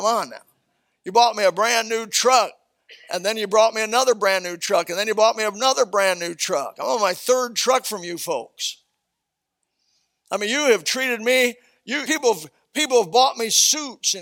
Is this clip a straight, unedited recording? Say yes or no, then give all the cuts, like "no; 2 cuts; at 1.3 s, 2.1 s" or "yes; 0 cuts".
no; 1 cut; at 12.0 s